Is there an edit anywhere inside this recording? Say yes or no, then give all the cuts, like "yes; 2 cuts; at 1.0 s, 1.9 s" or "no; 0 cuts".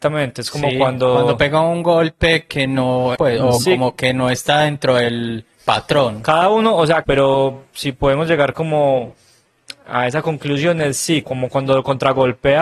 yes; 3 cuts; at 3.2 s, 7.0 s, 11.2 s